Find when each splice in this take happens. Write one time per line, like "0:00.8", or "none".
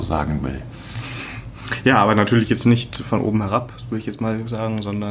none